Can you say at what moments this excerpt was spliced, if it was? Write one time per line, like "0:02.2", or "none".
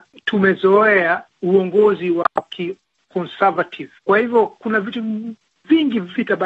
0:04.0